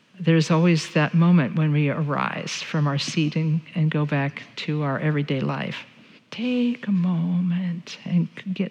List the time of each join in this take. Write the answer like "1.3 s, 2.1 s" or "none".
6.2 s